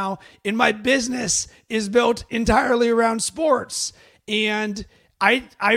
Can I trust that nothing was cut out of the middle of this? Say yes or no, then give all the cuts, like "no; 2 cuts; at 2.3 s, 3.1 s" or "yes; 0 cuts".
yes; 0 cuts